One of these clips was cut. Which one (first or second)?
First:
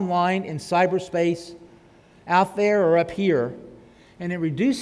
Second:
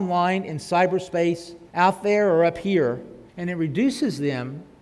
second